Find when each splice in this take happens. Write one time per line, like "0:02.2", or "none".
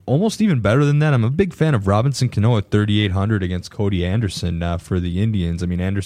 none